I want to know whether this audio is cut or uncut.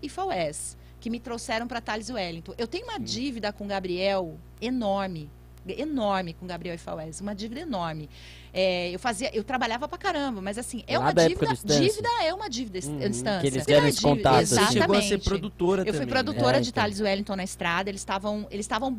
cut